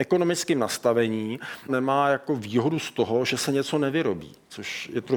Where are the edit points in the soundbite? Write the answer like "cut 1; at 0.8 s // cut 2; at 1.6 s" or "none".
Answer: cut 1; at 1.7 s